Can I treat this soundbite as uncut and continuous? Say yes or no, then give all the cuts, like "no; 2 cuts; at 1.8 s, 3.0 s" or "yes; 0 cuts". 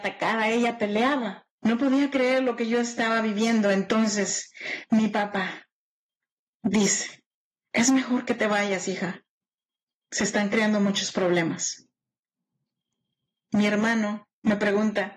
no; 1 cut; at 1.6 s